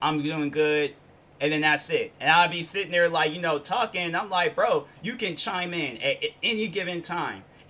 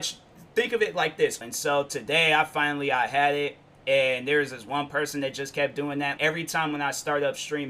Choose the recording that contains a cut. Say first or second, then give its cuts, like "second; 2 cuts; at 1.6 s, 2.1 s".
second; 2 cuts; at 1.4 s, 6.2 s